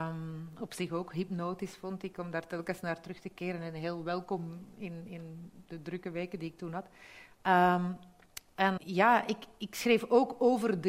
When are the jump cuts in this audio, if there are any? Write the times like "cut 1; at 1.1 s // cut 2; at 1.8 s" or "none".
cut 1; at 8.8 s

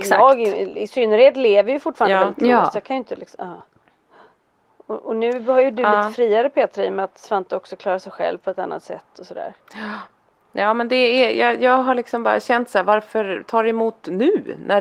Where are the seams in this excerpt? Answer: none

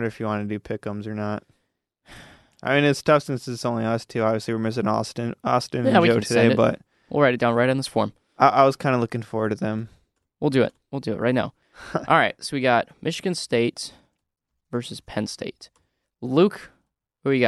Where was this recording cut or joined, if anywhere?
none

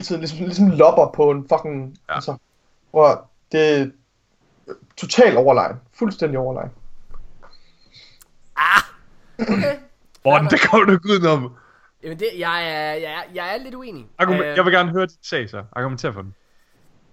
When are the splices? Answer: none

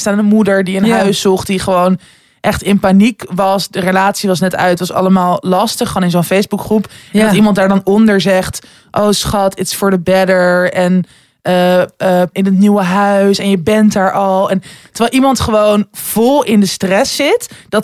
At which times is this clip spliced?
cut 1; at 12.3 s

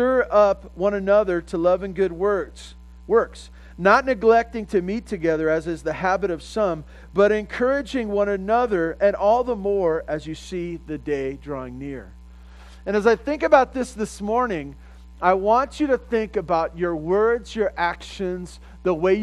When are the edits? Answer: none

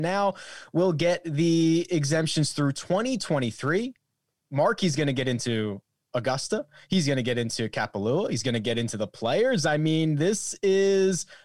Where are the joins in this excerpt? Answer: none

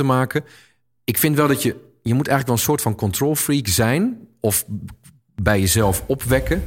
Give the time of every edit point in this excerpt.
none

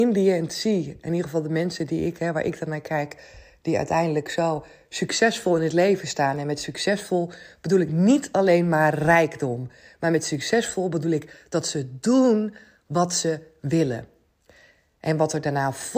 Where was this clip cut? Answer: none

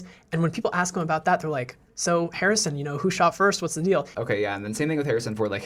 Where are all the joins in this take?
cut 1; at 4.1 s

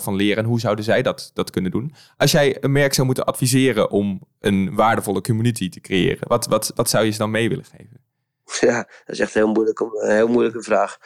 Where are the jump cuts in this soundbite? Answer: none

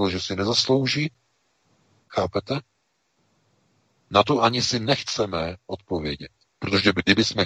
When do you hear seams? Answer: cut 1; at 2.0 s

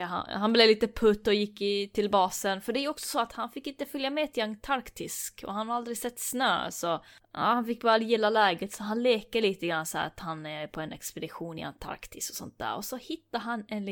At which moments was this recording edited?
none

